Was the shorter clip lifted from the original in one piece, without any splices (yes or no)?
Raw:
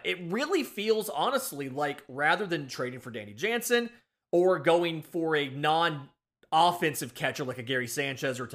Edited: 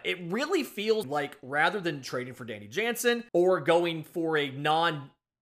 no